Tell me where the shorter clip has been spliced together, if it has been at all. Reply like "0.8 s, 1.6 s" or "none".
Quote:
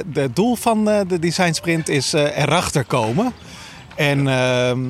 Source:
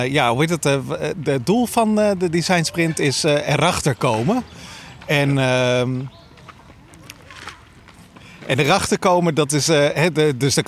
none